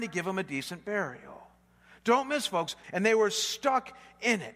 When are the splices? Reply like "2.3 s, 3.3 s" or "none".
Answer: 2.8 s